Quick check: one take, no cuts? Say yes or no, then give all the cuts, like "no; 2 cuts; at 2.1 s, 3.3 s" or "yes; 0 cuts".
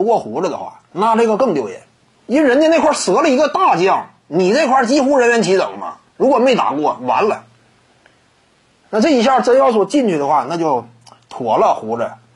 yes; 0 cuts